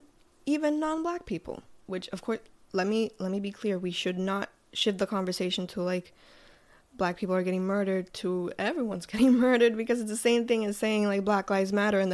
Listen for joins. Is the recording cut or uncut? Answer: uncut